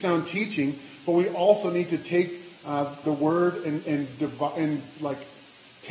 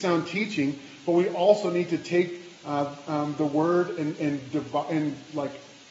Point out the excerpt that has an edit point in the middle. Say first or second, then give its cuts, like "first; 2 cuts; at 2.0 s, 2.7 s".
first; 1 cut; at 3.0 s